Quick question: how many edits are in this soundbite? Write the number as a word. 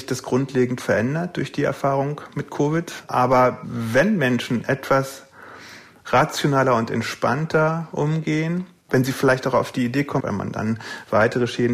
two